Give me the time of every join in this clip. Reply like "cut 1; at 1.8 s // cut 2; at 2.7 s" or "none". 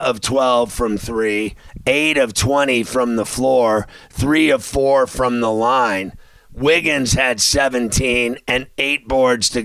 none